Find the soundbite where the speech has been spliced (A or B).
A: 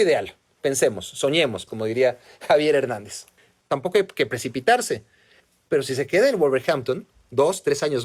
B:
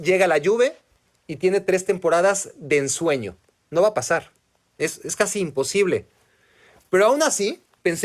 A